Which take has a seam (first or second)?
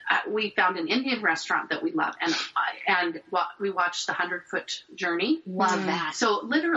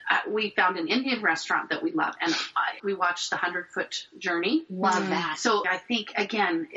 second